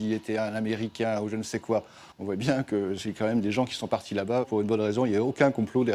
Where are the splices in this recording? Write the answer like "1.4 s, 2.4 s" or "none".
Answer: 2.1 s, 4.4 s